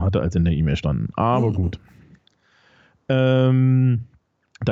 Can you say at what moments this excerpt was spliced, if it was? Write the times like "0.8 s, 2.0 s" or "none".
none